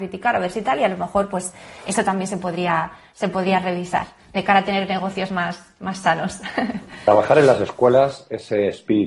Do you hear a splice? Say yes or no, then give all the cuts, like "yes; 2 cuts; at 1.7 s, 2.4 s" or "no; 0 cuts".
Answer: no; 0 cuts